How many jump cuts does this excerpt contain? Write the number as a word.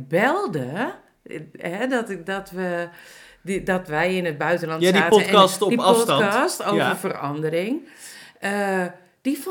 zero